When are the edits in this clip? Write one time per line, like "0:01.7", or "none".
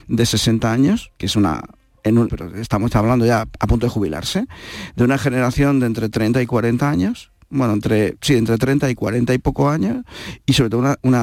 0:01.2
0:02.3

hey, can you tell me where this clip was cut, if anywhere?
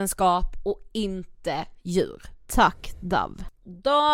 none

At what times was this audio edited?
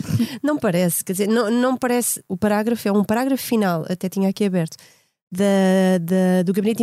0:02.3

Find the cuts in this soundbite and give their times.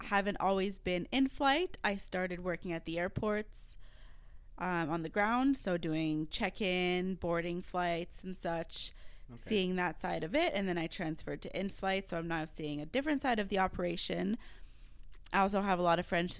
none

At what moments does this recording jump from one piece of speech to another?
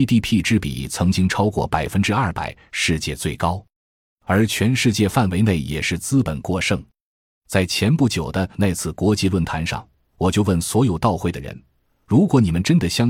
none

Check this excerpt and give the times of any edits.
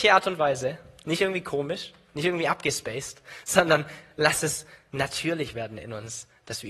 none

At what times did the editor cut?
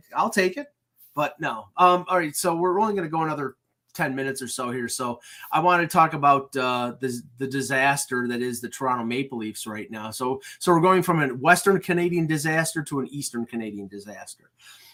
none

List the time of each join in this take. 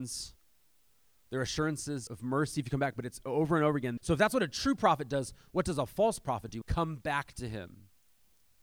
0:02.1
0:04.0
0:06.6

